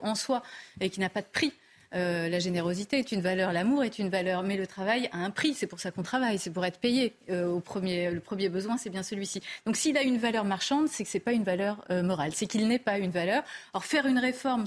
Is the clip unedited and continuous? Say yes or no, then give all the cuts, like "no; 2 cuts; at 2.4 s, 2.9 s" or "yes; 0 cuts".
yes; 0 cuts